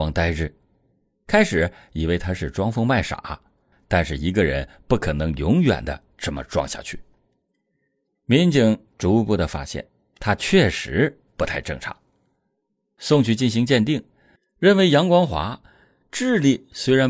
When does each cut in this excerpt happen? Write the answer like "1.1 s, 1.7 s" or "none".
none

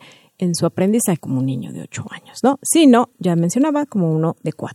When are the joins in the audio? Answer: 1.2 s, 3.1 s

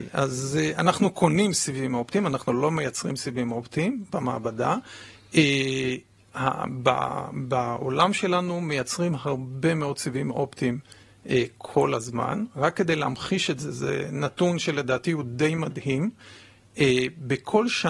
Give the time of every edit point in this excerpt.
none

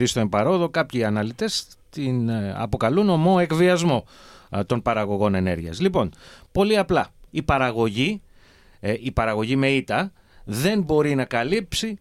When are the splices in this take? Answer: none

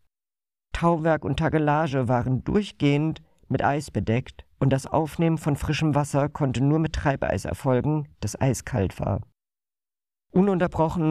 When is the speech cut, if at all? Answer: none

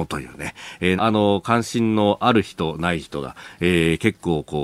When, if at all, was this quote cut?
1.0 s

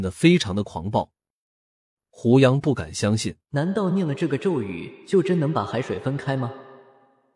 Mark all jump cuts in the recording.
1.9 s, 3.4 s

